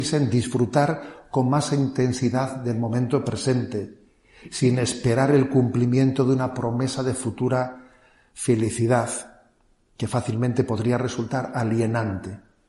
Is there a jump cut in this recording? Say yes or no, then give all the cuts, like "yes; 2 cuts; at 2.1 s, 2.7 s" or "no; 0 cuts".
no; 0 cuts